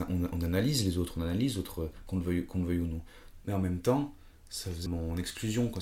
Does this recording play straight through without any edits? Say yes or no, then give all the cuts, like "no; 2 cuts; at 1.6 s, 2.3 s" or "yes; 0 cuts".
no; 2 cuts; at 3.4 s, 4.9 s